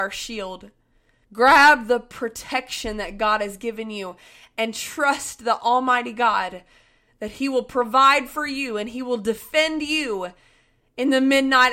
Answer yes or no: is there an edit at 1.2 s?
yes